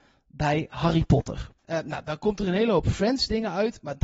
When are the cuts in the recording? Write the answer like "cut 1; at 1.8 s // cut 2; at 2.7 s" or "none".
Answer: cut 1; at 1.6 s